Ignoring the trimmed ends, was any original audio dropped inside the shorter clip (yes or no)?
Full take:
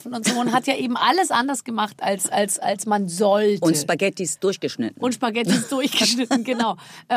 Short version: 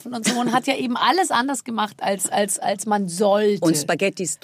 no